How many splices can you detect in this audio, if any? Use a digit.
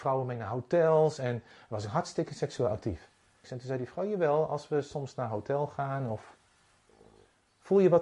1